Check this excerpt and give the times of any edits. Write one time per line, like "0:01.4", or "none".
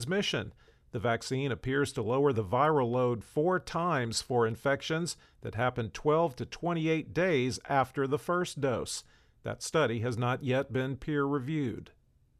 none